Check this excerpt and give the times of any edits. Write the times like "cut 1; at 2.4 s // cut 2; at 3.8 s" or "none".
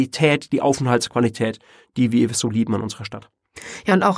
none